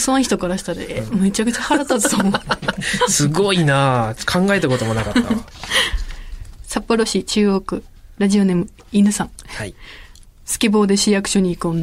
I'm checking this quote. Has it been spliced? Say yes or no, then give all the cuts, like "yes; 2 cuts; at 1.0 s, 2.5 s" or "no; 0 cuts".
no; 0 cuts